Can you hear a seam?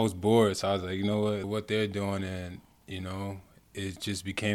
yes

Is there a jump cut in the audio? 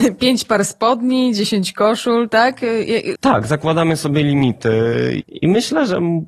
yes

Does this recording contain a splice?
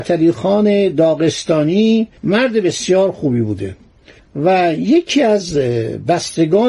yes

